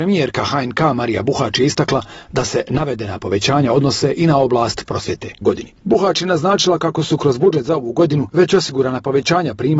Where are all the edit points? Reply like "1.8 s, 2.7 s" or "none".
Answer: 5.4 s